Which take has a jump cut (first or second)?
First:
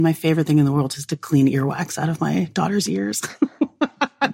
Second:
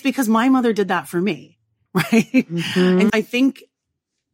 second